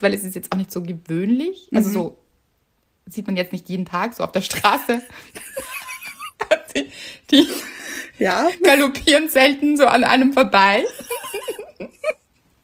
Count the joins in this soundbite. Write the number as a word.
zero